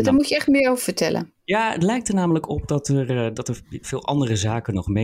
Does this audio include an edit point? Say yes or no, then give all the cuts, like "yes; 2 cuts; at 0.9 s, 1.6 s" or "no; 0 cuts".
yes; 1 cut; at 3.8 s